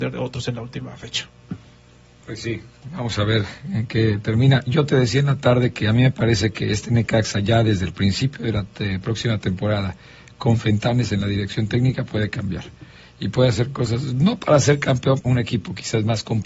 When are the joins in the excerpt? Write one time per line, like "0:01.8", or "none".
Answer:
0:15.2